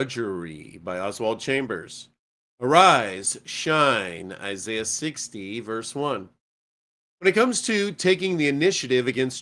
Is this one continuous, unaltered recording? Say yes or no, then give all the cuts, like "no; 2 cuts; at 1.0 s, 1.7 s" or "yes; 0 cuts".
yes; 0 cuts